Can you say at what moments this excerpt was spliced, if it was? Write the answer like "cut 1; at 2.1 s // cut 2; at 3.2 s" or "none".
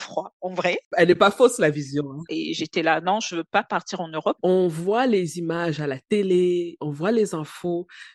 cut 1; at 2.3 s // cut 2; at 4.4 s